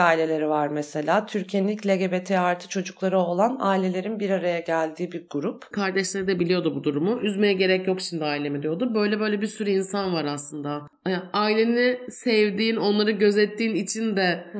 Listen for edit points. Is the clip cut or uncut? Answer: cut